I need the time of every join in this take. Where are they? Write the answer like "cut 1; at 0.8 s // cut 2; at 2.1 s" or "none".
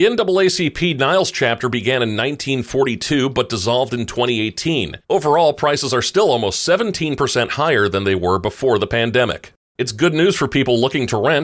cut 1; at 5.0 s